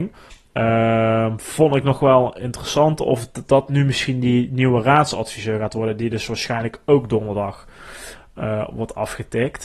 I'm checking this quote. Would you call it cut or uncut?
uncut